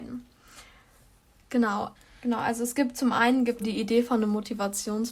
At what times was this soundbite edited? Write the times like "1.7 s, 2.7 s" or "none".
2.0 s, 3.6 s